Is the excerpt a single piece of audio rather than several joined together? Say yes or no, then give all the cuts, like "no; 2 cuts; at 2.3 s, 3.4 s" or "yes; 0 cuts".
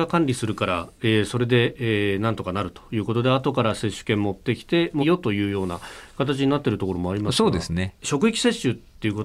no; 2 cuts; at 5.0 s, 8.0 s